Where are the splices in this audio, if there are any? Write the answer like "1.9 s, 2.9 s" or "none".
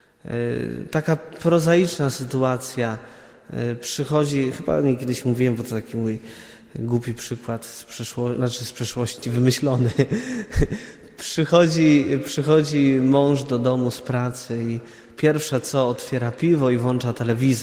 9.2 s